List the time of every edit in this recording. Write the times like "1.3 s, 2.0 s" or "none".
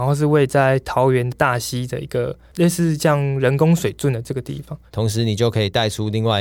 4.9 s